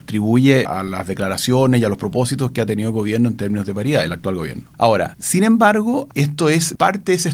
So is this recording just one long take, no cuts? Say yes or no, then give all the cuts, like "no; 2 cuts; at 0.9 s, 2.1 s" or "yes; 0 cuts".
yes; 0 cuts